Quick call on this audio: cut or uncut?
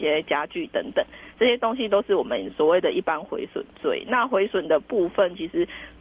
uncut